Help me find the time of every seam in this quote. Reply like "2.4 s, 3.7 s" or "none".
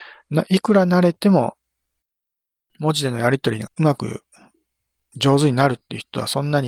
3.7 s